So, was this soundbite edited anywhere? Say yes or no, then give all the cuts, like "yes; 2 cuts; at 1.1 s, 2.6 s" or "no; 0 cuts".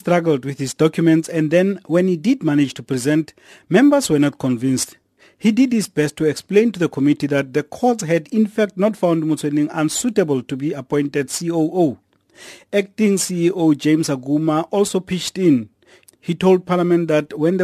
no; 0 cuts